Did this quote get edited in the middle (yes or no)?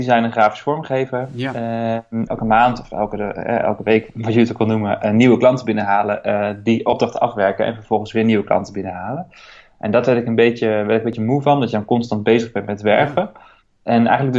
yes